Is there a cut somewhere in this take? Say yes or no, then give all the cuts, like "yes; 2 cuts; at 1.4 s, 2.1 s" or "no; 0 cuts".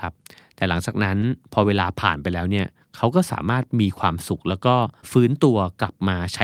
yes; 1 cut; at 5.0 s